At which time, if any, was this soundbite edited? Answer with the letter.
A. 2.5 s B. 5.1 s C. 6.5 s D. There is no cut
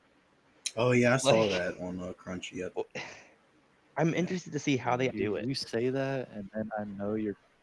B